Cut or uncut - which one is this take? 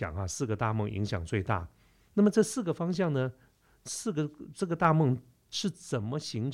uncut